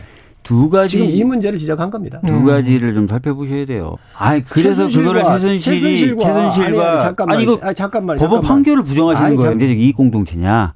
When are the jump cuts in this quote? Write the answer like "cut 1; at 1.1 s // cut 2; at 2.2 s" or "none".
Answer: cut 1; at 4.0 s // cut 2; at 9.5 s